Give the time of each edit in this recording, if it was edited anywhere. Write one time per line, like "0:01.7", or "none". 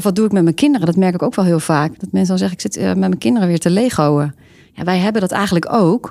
0:04.7